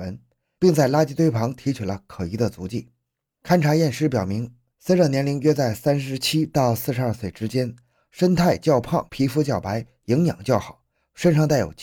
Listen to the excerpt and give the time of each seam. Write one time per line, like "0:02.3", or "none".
none